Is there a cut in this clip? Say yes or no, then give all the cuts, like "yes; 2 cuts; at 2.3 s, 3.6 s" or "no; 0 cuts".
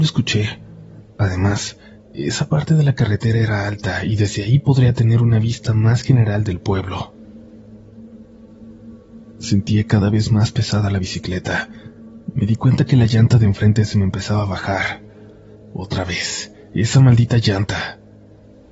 yes; 1 cut; at 1.0 s